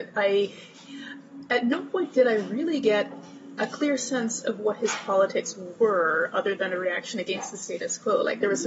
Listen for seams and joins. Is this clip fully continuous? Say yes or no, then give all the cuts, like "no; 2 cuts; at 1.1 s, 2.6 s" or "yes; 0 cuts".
yes; 0 cuts